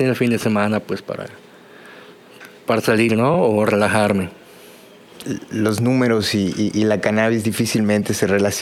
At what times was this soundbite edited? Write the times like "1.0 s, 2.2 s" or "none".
none